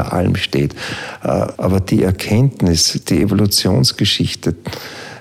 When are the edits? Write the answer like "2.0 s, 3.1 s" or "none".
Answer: 1.5 s